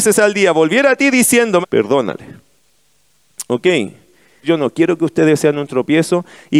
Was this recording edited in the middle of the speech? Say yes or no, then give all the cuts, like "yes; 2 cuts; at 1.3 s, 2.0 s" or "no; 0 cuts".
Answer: yes; 2 cuts; at 1.6 s, 4.4 s